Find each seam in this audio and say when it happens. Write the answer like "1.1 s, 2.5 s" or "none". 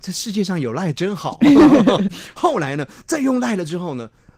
none